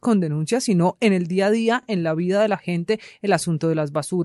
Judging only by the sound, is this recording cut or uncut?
uncut